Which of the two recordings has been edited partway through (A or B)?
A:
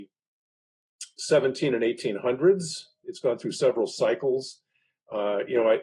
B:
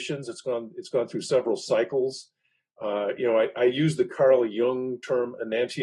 A